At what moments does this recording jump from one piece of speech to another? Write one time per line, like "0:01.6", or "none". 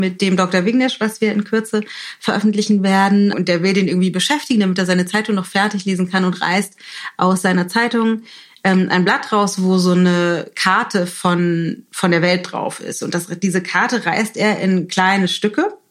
0:03.3